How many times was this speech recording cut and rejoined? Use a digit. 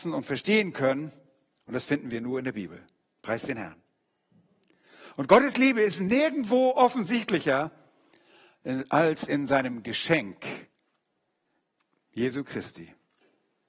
1